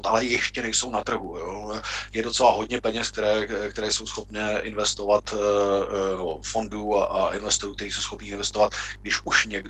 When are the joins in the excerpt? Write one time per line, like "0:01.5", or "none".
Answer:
none